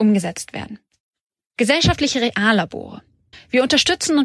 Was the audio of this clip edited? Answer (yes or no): yes